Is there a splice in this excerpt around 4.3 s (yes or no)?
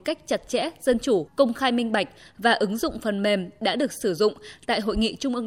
no